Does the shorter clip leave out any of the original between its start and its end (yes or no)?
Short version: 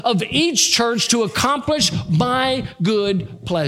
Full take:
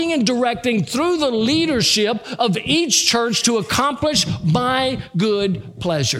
no